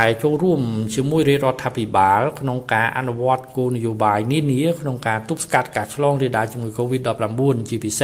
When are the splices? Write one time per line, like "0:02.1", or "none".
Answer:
none